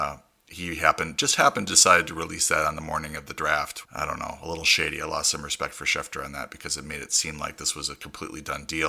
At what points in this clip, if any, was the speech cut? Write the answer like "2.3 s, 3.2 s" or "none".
3.8 s